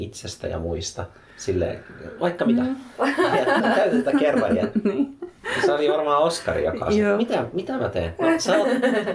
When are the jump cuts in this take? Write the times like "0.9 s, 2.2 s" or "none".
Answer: 3.6 s